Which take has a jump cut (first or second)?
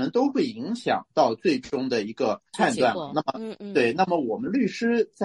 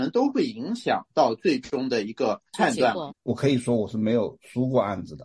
second